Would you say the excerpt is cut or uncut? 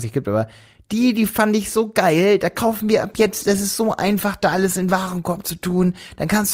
uncut